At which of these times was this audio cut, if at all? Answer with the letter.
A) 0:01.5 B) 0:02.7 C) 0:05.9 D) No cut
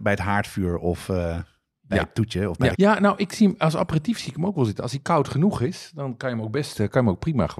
B